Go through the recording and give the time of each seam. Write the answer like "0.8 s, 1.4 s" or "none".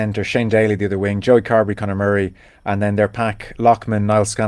none